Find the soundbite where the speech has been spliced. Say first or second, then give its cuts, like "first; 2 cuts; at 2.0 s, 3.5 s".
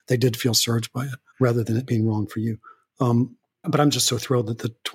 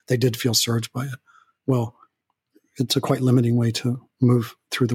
first; 2 cuts; at 1.3 s, 3.6 s